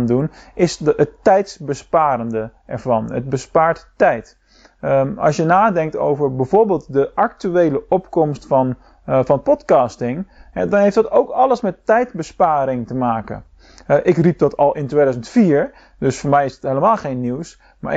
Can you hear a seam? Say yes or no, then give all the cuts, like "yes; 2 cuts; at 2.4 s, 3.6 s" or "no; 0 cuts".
no; 0 cuts